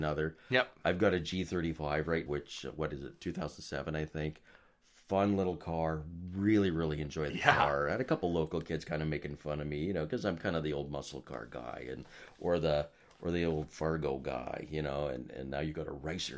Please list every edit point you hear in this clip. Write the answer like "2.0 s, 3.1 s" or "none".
2.3 s